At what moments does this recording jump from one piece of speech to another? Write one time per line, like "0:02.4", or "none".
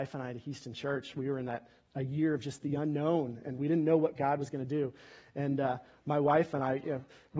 none